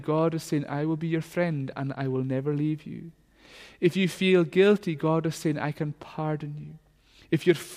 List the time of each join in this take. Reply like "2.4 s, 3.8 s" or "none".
none

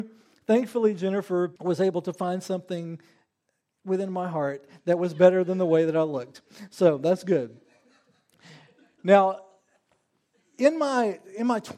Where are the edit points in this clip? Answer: 1.6 s

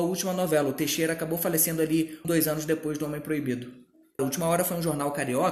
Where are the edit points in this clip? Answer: 2.2 s, 4.2 s

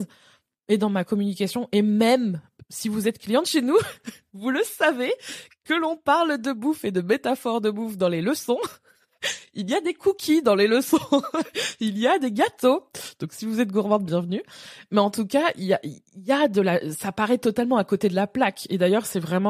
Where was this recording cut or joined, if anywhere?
none

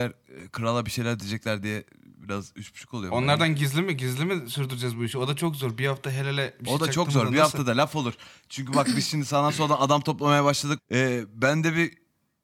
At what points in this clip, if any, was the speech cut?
10.8 s

